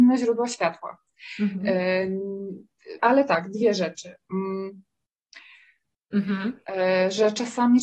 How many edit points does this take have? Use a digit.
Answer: 2